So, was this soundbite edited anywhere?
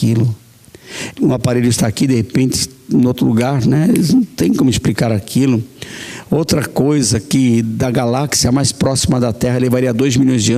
yes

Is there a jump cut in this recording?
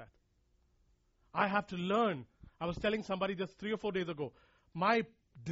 no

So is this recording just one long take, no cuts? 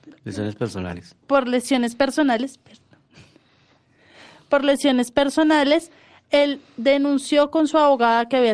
yes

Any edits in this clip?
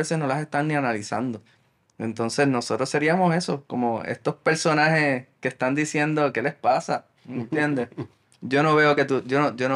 no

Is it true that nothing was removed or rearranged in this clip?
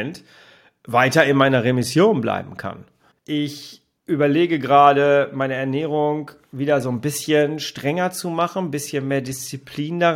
no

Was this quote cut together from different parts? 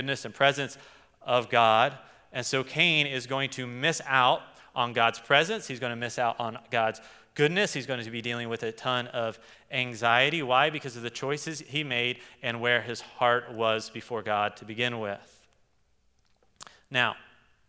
no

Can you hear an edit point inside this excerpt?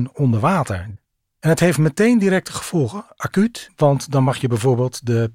no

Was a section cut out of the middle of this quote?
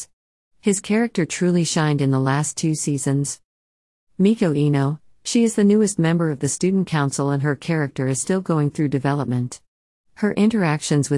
no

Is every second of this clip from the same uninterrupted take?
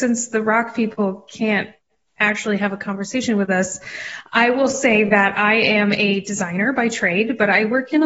yes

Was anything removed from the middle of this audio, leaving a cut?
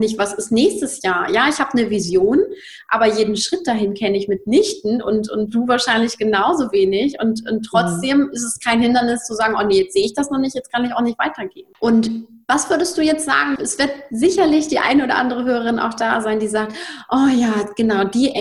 yes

